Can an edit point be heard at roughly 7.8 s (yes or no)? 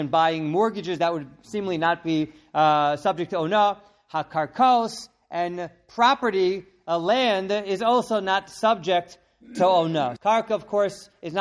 no